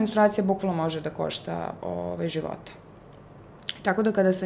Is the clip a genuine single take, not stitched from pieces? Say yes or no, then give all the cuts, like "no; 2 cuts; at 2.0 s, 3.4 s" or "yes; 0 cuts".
yes; 0 cuts